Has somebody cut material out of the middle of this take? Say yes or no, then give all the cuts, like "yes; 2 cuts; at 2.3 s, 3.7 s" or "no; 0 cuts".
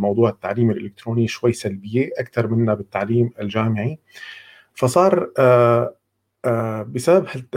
yes; 1 cut; at 4.7 s